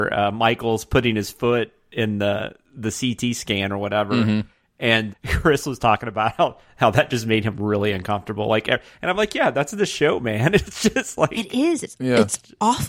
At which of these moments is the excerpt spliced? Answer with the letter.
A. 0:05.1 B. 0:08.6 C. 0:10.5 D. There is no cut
A